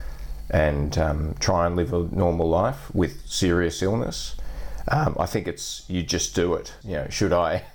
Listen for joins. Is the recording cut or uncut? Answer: cut